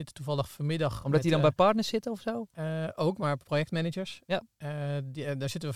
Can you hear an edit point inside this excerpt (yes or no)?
no